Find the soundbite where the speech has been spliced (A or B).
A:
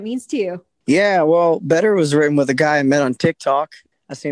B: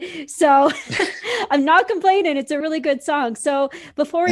B